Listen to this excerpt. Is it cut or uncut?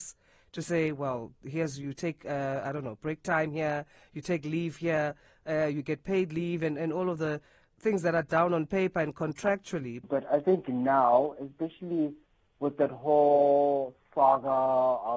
cut